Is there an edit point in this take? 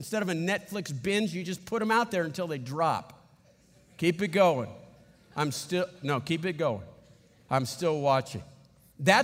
no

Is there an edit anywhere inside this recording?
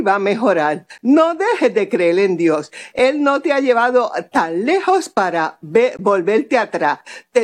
no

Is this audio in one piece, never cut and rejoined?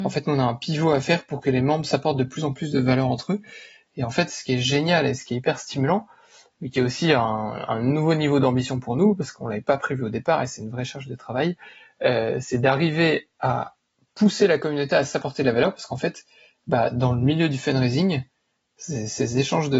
no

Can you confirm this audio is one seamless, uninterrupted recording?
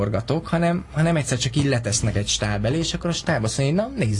yes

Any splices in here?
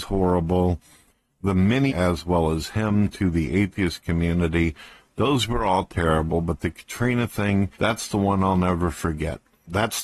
yes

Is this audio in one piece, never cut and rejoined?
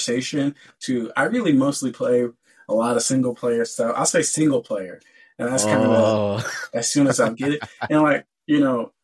yes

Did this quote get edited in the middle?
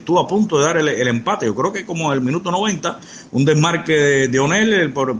no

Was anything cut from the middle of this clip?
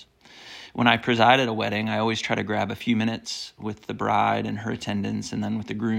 no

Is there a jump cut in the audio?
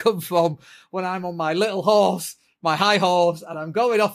no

